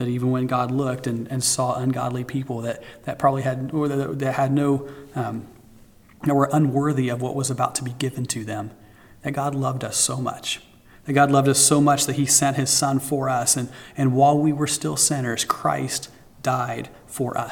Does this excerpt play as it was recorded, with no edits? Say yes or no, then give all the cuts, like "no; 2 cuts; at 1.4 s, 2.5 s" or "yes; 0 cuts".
yes; 0 cuts